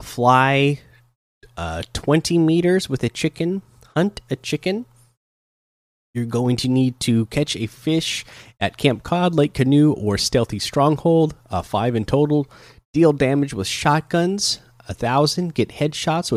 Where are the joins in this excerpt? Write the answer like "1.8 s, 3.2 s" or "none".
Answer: none